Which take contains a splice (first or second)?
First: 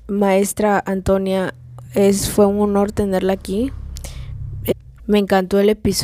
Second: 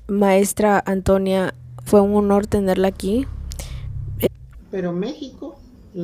second